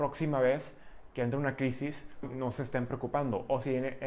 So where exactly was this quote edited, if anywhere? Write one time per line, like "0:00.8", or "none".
0:02.2